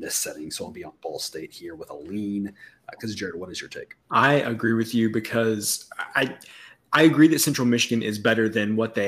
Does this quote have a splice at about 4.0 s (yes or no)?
yes